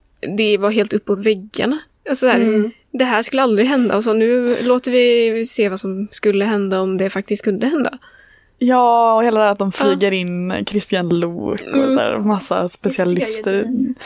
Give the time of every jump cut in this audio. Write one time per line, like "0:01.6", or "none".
none